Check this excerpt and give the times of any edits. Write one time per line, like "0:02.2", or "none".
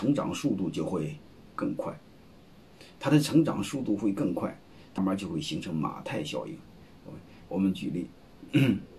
0:05.0
0:07.5